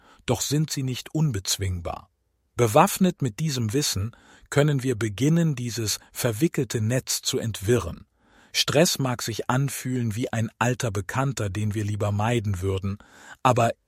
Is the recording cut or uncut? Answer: uncut